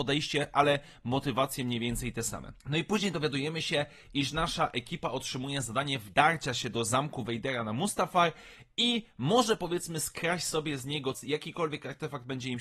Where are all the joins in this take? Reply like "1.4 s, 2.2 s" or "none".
2.6 s, 11.1 s